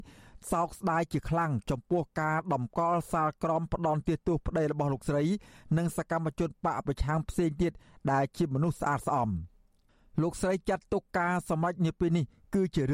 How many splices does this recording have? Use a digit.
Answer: 0